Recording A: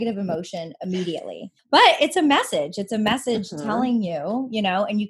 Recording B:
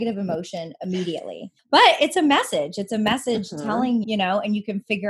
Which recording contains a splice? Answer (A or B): B